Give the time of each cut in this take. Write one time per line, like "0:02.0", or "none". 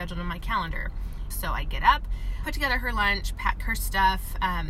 0:01.3
0:02.4